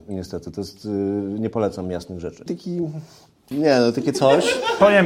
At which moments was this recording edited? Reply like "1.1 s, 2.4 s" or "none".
2.5 s, 3.5 s

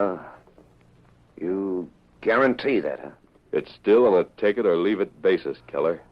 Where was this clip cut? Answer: none

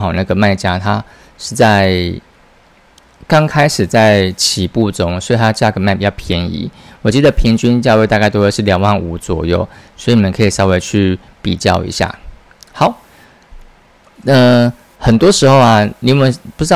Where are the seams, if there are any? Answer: 14.0 s

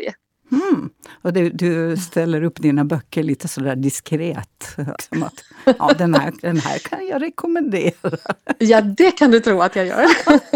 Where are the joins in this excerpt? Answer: 5.0 s

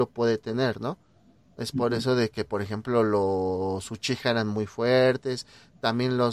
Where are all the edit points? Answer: none

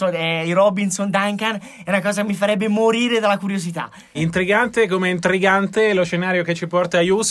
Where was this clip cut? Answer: 4.1 s

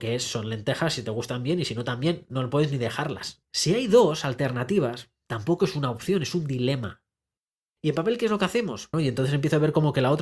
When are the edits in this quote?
3.4 s, 7.6 s, 8.9 s

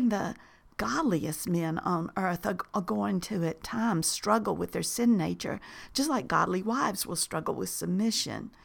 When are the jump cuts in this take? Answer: none

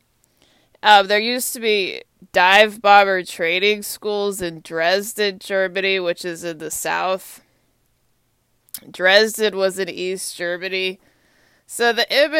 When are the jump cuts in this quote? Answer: none

